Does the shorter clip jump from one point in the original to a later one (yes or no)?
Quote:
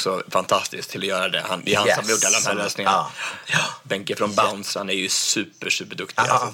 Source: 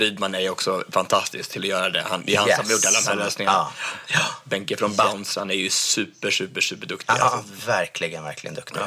yes